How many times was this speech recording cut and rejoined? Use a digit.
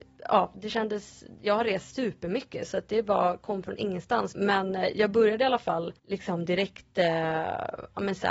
2